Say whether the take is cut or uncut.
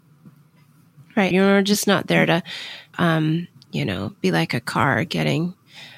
cut